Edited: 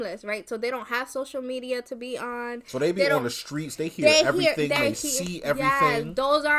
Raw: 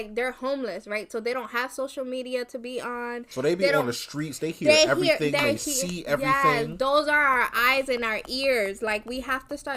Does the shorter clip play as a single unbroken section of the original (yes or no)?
yes